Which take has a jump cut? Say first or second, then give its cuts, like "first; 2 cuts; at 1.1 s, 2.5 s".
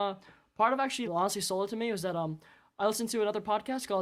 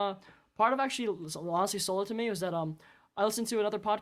first; 1 cut; at 1.0 s